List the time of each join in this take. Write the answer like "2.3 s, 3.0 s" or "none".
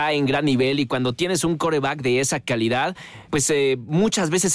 3.3 s